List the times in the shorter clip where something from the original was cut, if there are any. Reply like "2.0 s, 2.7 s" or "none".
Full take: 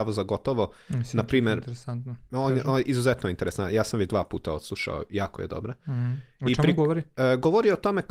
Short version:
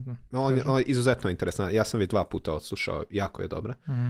none